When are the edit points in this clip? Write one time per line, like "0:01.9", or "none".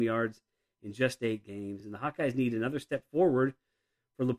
none